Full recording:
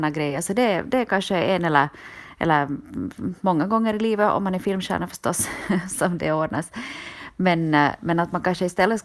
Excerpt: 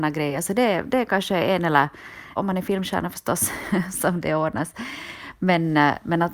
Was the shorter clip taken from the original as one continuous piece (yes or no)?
no